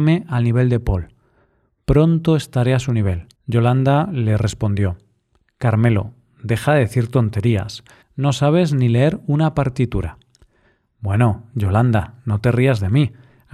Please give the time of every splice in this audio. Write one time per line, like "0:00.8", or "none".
0:03.3
0:08.0